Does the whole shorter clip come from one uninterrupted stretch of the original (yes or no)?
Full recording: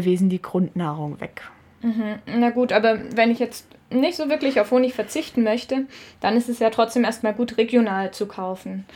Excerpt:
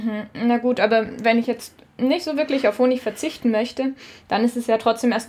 yes